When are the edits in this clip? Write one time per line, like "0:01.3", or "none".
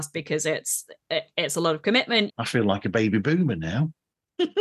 0:02.3